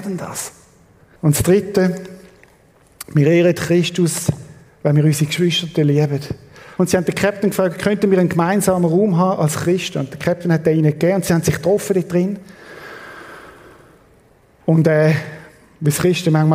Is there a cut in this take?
yes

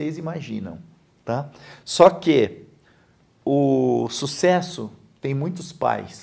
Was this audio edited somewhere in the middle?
no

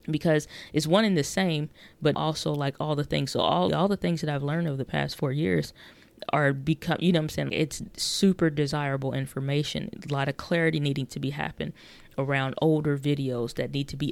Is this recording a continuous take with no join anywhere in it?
no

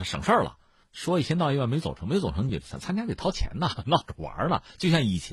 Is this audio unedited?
yes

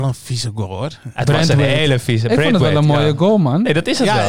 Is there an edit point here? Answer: no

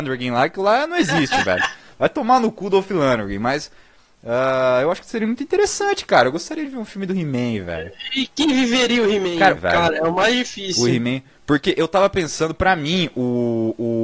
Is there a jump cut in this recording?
yes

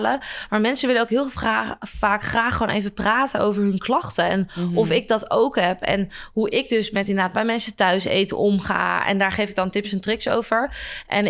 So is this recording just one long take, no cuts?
yes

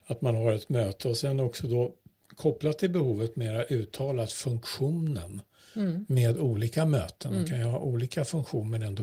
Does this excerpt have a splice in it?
no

